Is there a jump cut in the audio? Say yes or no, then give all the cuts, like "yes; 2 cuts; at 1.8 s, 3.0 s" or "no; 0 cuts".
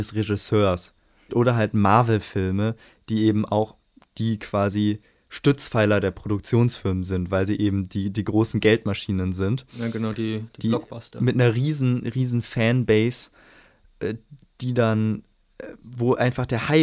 yes; 1 cut; at 1.3 s